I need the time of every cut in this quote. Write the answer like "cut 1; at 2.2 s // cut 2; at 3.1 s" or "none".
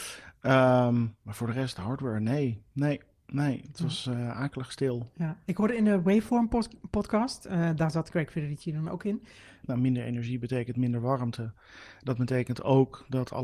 cut 1; at 9.6 s